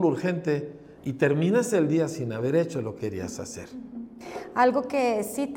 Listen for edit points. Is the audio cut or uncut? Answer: cut